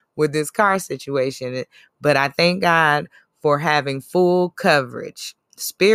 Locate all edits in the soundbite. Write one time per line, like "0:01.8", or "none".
none